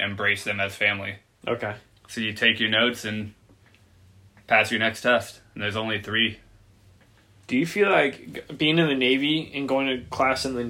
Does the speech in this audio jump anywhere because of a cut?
yes; 1 cut; at 1.4 s

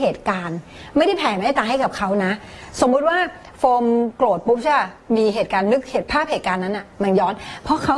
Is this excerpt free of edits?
yes; 0 cuts

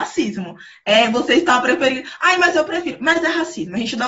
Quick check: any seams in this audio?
no; 0 cuts

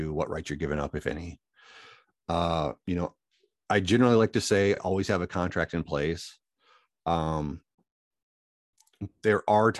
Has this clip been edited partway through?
no; 0 cuts

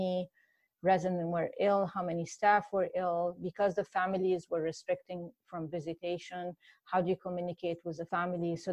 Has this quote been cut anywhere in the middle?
no; 0 cuts

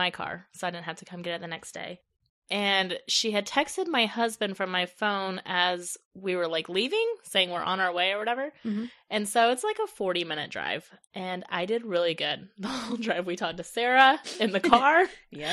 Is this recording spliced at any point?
no; 0 cuts

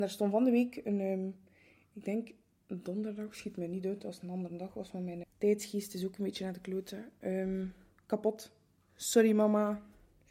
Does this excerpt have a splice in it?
yes; 1 cut; at 5.2 s

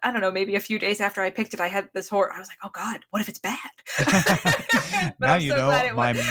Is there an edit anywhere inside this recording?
no; 0 cuts

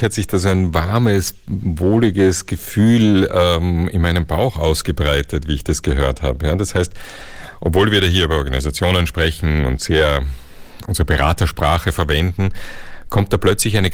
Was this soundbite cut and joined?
no; 0 cuts

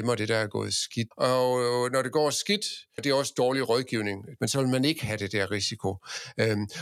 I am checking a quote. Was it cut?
yes; 3 cuts; at 1.1 s, 3.0 s, 4.4 s

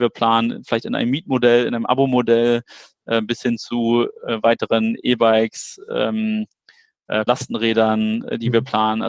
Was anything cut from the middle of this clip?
yes; 1 cut; at 7.3 s

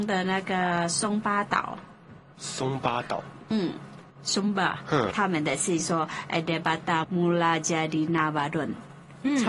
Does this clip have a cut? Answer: yes; 3 cuts; at 4.1 s, 5.1 s, 7.0 s

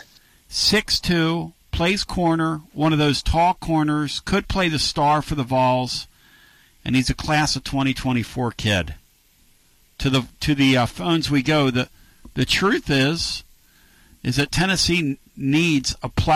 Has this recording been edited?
no; 0 cuts

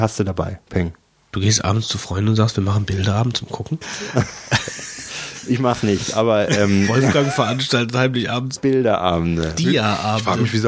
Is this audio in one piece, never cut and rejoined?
no; 1 cut; at 3.8 s

